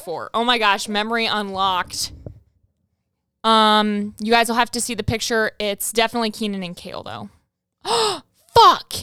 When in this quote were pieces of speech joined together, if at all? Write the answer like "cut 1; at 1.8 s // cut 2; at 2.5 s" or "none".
cut 1; at 3.4 s